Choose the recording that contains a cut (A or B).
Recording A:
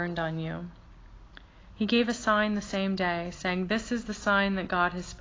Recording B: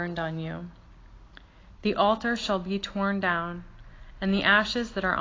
B